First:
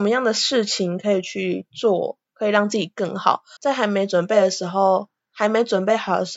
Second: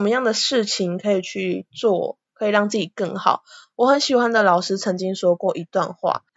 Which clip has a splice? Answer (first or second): first